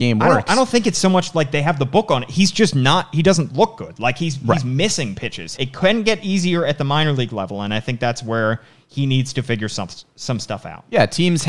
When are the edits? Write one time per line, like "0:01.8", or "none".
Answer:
0:05.6